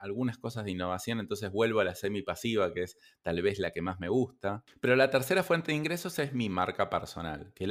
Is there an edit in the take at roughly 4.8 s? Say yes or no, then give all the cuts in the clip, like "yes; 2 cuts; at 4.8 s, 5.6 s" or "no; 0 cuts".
no; 0 cuts